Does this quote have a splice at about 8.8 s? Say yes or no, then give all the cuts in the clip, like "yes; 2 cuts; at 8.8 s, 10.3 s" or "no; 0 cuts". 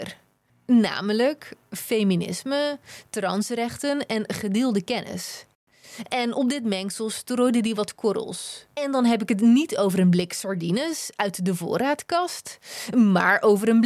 yes; 1 cut; at 8.8 s